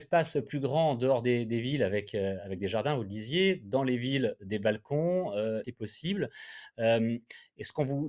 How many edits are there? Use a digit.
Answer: 1